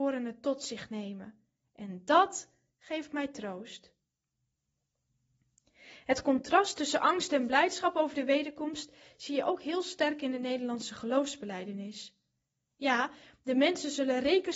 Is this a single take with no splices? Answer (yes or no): no